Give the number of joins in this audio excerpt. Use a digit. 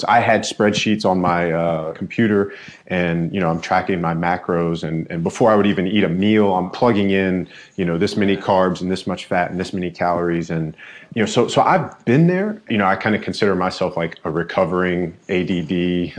0